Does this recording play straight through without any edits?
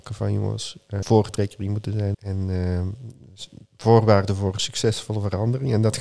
no; 2 cuts; at 1.0 s, 2.1 s

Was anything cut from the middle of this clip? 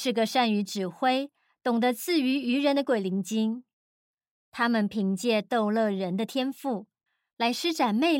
no; 0 cuts

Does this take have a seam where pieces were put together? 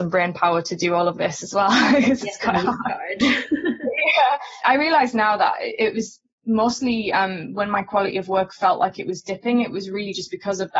no; 0 cuts

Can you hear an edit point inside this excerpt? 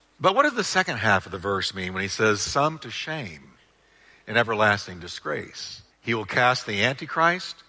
yes; 1 cut; at 5.9 s

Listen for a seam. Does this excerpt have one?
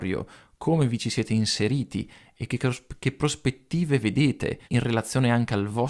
yes; 1 cut; at 4.6 s

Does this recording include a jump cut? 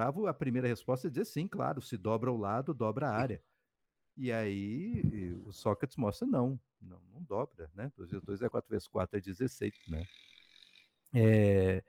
yes; 2 cuts; at 8.5 s, 9.7 s

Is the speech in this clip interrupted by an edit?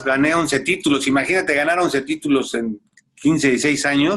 no; 0 cuts

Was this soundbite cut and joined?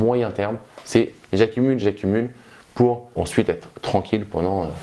yes; 2 cuts; at 1.8 s, 3.1 s

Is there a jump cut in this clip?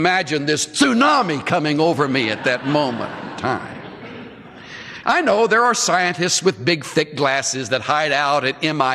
yes; 1 cut; at 5.0 s

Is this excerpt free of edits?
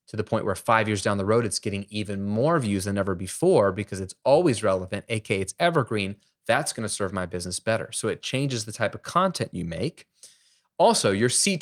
yes; 0 cuts

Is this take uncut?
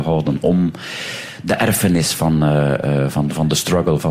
yes; 0 cuts

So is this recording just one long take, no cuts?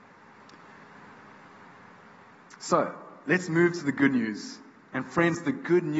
yes; 0 cuts

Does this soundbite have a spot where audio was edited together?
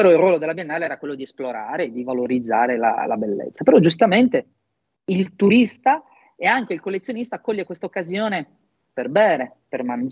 no; 0 cuts

